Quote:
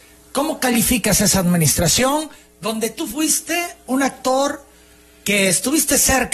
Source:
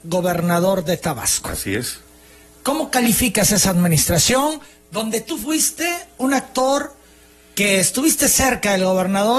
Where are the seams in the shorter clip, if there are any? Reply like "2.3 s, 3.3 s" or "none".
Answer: none